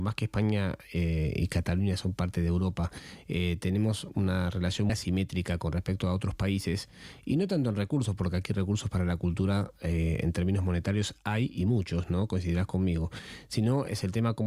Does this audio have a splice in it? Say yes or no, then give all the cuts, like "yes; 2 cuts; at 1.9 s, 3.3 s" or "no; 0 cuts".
yes; 1 cut; at 4.9 s